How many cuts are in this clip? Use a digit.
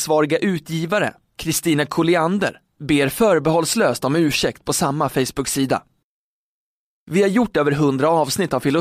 0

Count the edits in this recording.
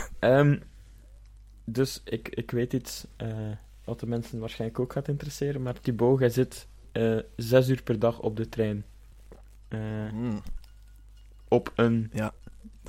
0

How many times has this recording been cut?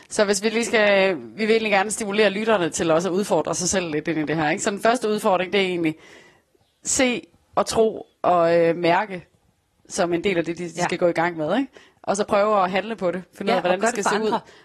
0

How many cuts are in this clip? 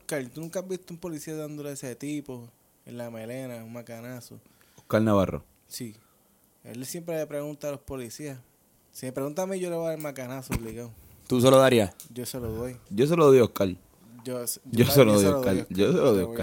1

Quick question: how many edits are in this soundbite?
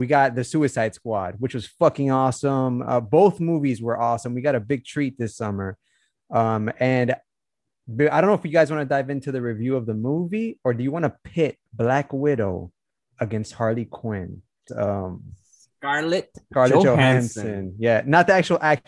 1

